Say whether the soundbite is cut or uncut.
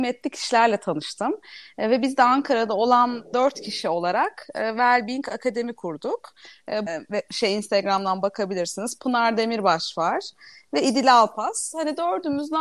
cut